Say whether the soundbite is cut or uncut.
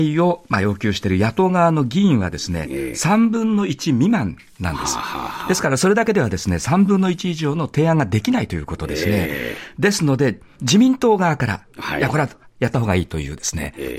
uncut